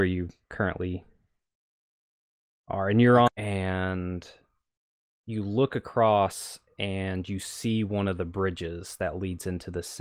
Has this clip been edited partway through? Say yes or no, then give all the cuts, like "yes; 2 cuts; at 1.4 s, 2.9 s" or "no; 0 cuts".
yes; 1 cut; at 3.3 s